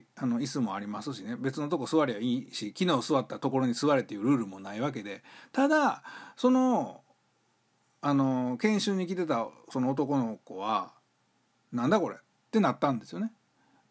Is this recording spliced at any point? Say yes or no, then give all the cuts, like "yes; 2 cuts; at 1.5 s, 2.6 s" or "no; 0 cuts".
no; 0 cuts